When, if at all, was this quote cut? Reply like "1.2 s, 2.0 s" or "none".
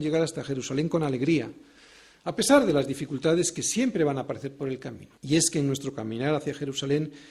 5.2 s